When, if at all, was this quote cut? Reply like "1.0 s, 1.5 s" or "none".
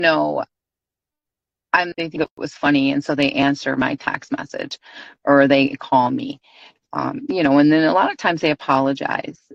1.9 s